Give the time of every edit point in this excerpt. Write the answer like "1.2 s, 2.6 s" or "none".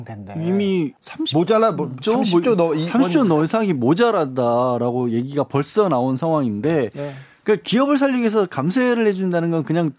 none